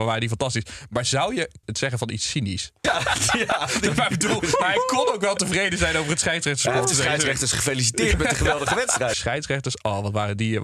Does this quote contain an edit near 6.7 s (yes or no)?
no